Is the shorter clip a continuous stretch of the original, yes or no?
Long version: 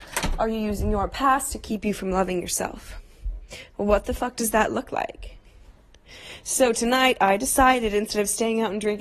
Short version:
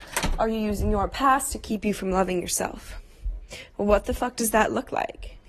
yes